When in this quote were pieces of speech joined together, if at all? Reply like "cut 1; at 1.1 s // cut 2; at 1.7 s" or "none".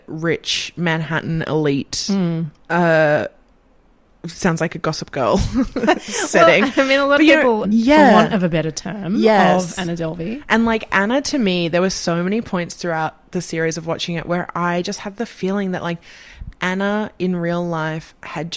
cut 1; at 7.6 s